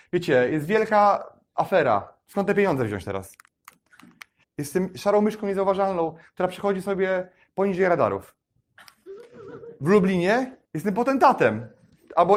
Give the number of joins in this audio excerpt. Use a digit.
2